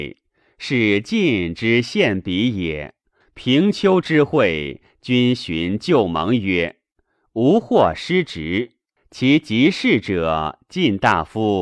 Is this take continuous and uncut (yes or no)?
no